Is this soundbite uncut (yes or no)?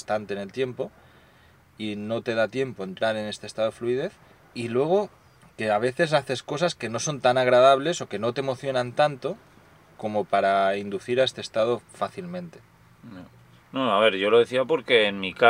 yes